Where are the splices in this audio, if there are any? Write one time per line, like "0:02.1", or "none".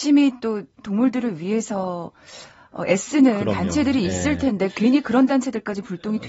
none